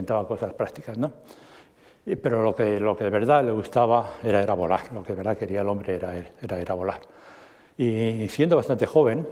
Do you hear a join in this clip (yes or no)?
no